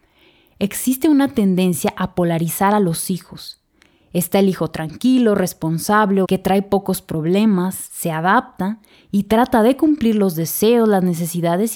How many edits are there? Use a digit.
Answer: 1